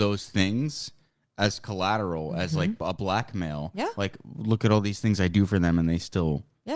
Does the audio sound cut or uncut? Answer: uncut